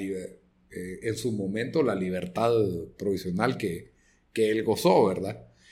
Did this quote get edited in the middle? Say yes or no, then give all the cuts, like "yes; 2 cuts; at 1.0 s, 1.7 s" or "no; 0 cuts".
no; 0 cuts